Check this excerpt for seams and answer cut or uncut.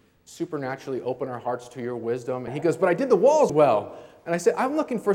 cut